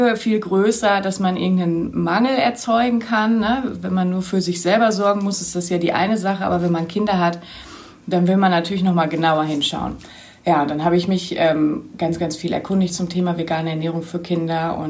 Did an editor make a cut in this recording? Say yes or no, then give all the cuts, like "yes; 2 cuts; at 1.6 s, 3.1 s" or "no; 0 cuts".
no; 0 cuts